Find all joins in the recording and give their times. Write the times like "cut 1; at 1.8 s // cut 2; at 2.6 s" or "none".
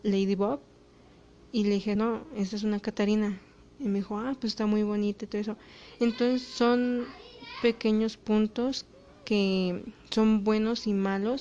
none